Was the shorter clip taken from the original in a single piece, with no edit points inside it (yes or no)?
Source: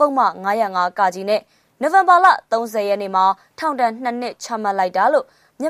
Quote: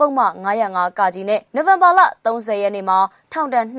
no